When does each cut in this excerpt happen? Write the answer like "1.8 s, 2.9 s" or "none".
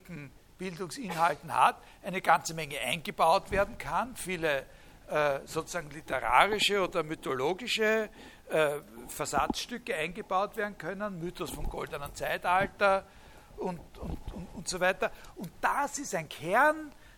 13.9 s